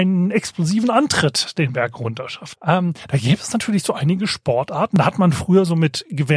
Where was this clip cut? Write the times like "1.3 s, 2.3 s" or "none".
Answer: 2.5 s